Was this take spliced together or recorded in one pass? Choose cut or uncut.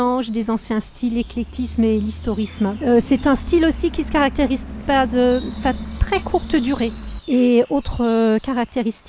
cut